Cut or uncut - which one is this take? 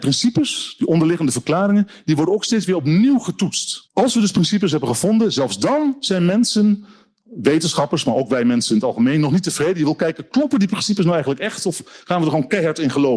cut